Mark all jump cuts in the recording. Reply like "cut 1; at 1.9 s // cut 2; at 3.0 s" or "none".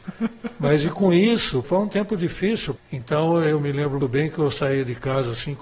cut 1; at 1.6 s // cut 2; at 2.8 s // cut 3; at 4.0 s